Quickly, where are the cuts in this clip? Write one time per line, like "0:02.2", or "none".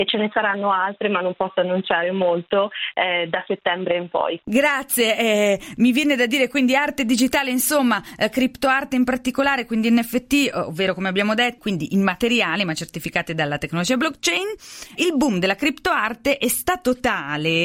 0:11.6